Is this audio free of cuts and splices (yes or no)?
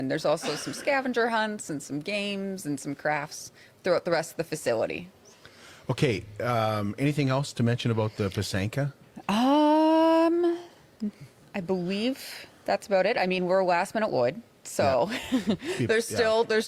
yes